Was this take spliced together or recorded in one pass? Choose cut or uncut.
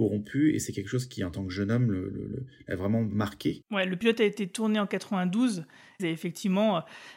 cut